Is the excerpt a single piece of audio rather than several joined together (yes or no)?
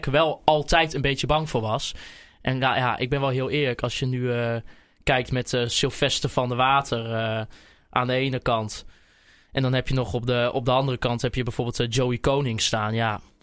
yes